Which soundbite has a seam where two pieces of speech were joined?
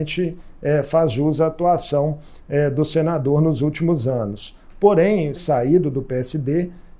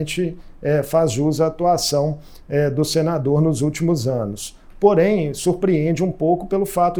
first; 1 cut; at 5.4 s

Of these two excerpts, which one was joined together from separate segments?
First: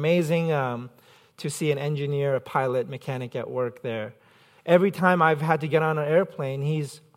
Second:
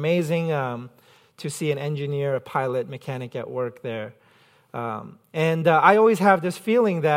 first; 1 cut; at 4.6 s

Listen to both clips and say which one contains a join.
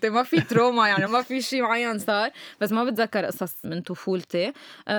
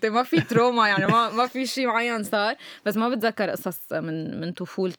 first; 2 cuts; at 1.1 s, 3.6 s

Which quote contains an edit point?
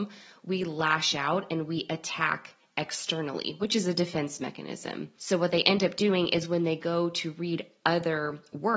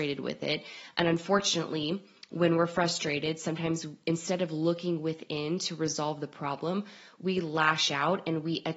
first; 1 cut; at 5.2 s

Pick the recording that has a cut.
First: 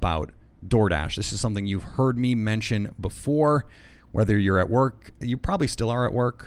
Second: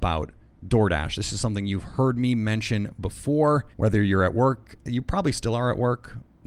second; 1 cut; at 3.7 s

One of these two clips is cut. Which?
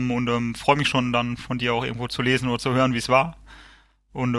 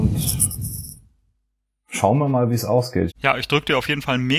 second; 1 cut; at 3.1 s

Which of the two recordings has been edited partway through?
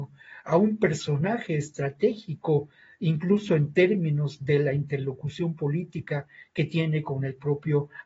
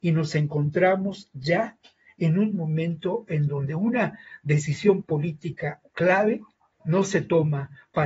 second; 1 cut; at 6.8 s

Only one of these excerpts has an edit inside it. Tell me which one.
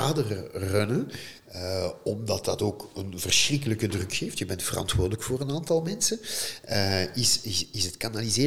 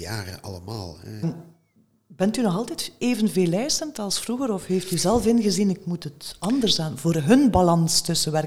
second; 1 cut; at 1.2 s

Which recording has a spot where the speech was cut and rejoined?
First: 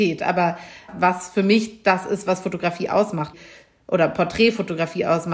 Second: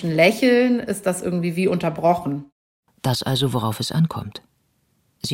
second; 1 cut; at 2.9 s

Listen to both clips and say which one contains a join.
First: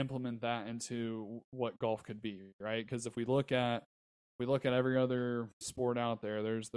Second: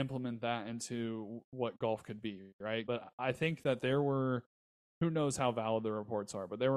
second; 1 cut; at 2.9 s

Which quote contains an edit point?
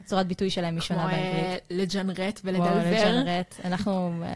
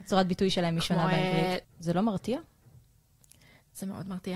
second; 1 cut; at 1.6 s

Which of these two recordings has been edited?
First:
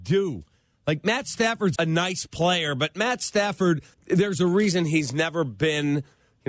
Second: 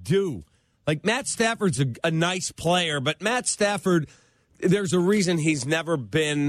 first; 2 cuts; at 1.8 s, 3.9 s

